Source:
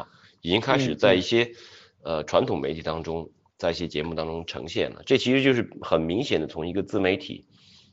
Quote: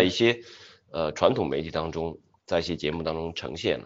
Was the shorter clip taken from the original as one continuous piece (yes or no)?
yes